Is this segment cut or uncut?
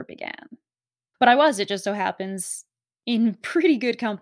cut